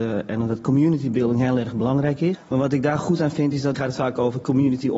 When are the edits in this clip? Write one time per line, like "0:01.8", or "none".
0:02.4
0:03.7

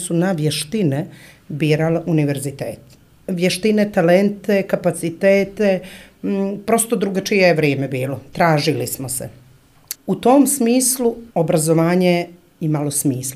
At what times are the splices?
0:09.9
0:11.3

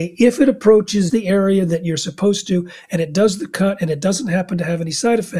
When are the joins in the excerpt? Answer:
0:01.1

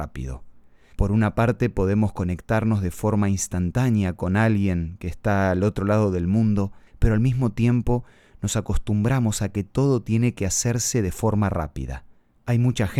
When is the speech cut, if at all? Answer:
0:00.9
0:06.9

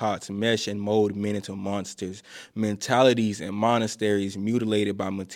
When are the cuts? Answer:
none

